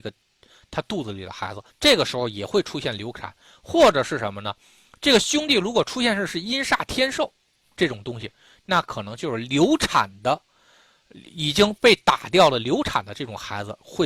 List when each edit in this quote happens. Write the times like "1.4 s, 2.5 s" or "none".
1.7 s